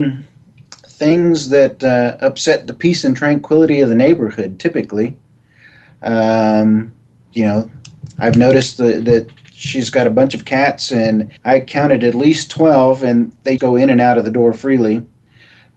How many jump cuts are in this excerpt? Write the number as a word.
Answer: three